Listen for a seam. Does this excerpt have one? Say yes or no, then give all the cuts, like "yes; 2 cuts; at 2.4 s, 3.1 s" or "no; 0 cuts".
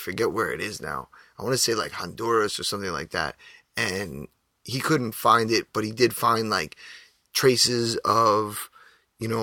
no; 0 cuts